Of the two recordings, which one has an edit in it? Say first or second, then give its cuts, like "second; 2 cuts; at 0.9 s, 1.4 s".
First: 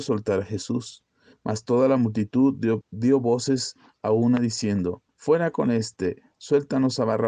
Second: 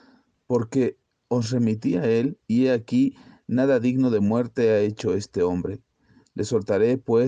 first; 3 cuts; at 1.3 s, 2.8 s, 5.1 s